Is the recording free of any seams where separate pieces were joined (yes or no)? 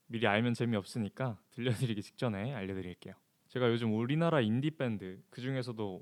no